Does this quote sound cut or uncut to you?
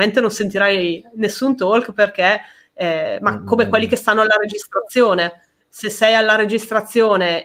uncut